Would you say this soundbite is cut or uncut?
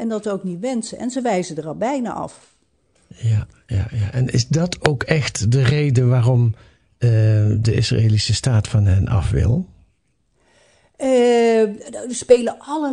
uncut